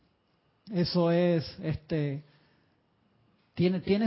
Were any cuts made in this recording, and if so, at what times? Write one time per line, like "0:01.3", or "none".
none